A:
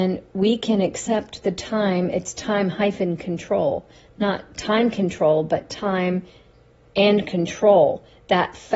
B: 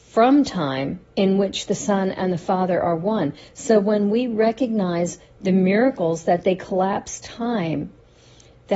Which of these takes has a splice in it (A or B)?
B